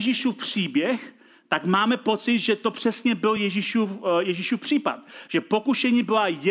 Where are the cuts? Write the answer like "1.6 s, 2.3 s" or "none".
none